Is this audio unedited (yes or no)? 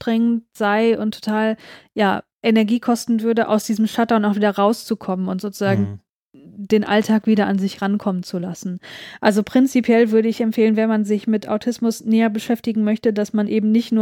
yes